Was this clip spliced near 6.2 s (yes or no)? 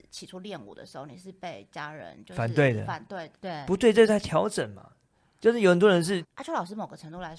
yes